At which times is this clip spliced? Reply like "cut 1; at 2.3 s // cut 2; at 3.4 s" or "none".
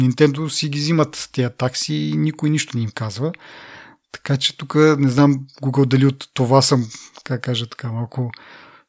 none